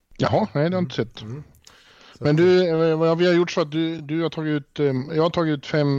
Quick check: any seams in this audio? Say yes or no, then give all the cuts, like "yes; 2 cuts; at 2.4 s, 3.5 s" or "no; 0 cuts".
no; 0 cuts